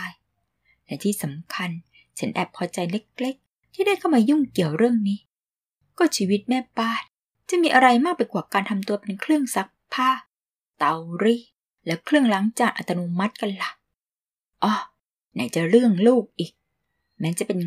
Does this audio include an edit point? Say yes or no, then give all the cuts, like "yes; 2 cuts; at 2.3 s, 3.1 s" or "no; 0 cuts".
no; 0 cuts